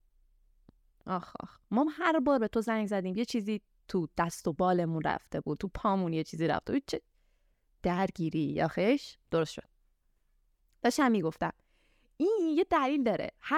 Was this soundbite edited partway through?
no; 0 cuts

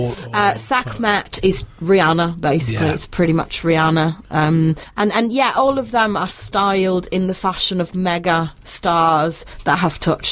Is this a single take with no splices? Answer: yes; 0 cuts

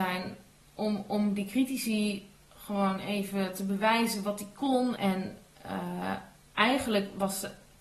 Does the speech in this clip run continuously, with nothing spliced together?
no; 1 cut; at 5.0 s

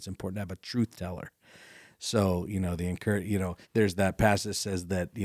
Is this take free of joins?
no; 1 cut; at 3.6 s

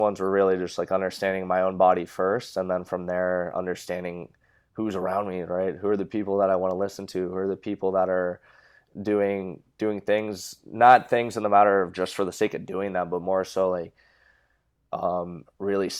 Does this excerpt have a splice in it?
no; 0 cuts

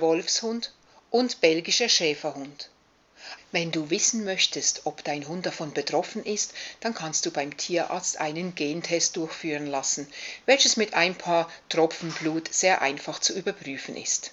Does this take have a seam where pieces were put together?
yes; 1 cut; at 3.4 s

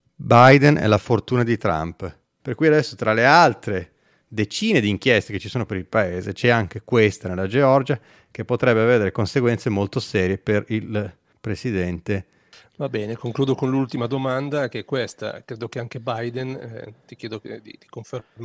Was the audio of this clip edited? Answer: yes; 1 cut; at 2.4 s

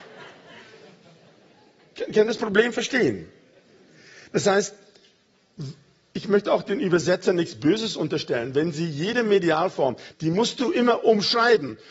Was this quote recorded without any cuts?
no; 1 cut; at 10.1 s

